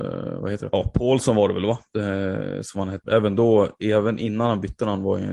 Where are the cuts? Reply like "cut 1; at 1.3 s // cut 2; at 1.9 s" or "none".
none